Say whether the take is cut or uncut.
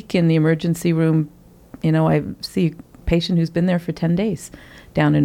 uncut